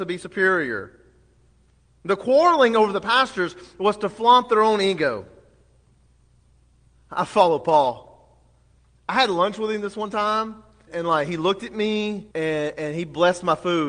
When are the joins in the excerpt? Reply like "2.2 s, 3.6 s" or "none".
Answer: 10.9 s, 12.3 s